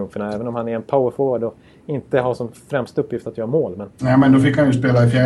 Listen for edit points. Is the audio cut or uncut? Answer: cut